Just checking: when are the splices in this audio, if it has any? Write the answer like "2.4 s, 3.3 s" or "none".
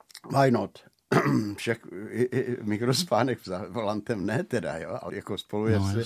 5.1 s

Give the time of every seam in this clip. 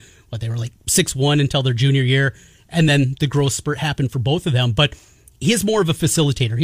none

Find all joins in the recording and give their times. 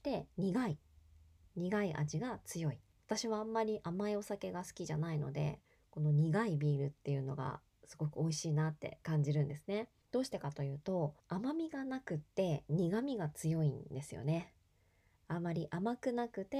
2.9 s, 10.0 s, 11.2 s

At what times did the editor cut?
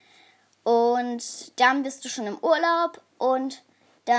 none

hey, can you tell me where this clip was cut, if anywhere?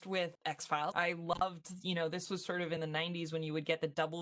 0.9 s

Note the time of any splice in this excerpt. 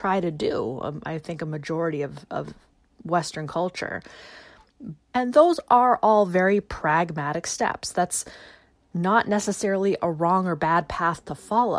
5.0 s

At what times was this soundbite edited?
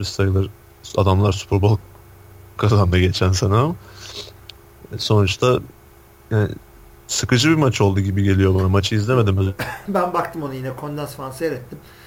9.9 s

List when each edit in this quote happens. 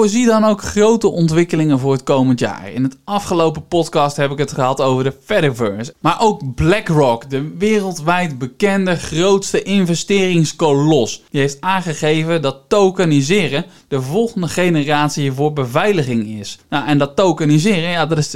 5.9 s

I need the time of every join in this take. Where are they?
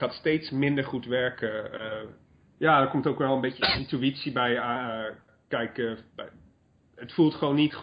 2.5 s

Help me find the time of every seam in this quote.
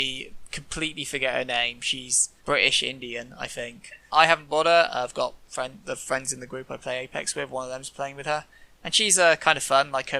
2.4 s, 4.1 s

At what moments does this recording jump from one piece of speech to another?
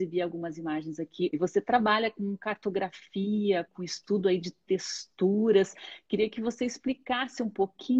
1.3 s, 3.7 s

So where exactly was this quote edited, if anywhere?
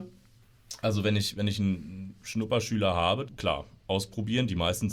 3.3 s

